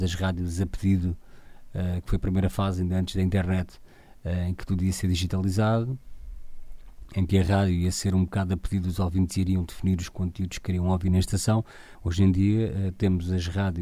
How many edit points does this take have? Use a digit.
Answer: 1